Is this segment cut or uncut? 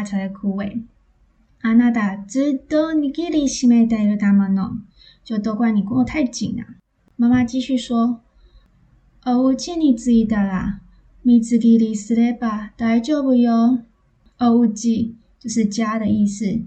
uncut